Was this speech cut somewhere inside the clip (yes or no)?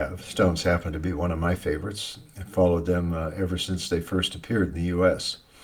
no